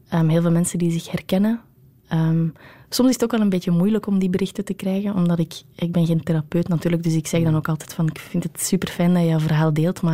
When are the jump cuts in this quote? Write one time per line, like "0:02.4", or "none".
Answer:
none